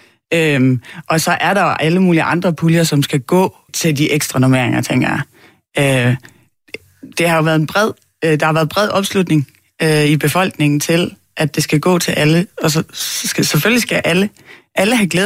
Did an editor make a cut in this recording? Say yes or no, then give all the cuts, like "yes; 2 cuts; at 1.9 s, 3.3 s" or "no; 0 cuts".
yes; 1 cut; at 3.7 s